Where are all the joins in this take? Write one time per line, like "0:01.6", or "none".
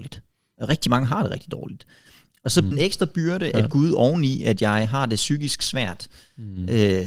0:02.7